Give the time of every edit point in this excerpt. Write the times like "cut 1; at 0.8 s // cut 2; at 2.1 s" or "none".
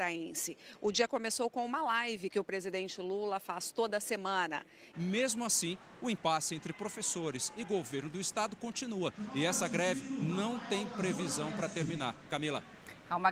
cut 1; at 4.9 s